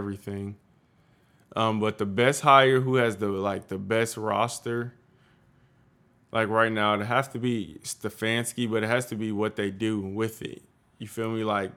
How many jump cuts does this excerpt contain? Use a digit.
0